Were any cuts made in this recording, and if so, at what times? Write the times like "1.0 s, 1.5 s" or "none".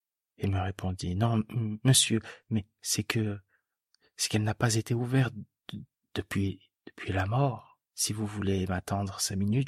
none